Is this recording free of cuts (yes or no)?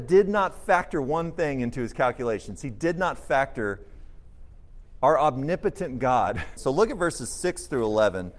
no